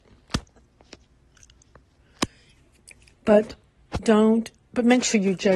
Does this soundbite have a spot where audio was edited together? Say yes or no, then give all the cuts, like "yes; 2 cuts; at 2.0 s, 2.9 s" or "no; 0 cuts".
no; 0 cuts